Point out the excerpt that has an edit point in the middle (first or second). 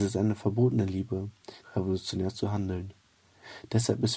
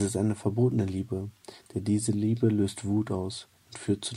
first